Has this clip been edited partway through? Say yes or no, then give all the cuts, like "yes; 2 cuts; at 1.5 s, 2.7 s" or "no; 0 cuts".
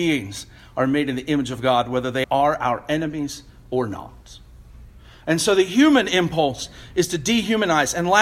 yes; 1 cut; at 2.2 s